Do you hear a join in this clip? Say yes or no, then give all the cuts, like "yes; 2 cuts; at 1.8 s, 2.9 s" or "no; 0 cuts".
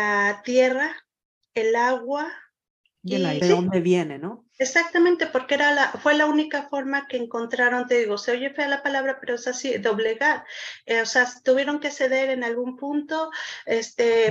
yes; 1 cut; at 3.4 s